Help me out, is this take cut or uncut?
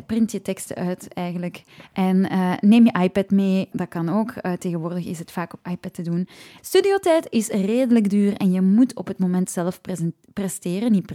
cut